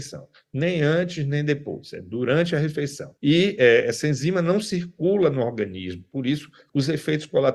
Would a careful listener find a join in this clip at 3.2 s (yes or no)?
no